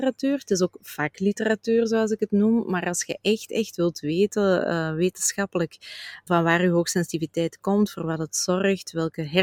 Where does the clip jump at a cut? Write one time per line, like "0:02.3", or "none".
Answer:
0:06.3